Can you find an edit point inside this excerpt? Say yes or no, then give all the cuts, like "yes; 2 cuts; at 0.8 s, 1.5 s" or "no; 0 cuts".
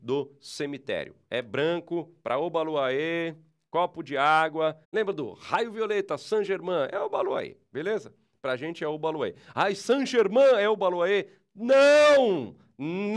yes; 1 cut; at 4.8 s